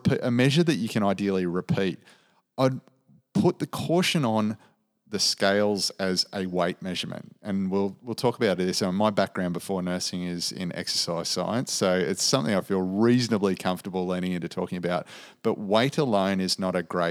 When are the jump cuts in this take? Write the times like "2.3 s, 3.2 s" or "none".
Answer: none